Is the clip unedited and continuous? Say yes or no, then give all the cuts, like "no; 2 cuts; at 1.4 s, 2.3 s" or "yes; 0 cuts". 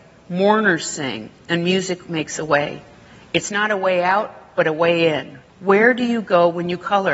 no; 1 cut; at 5.5 s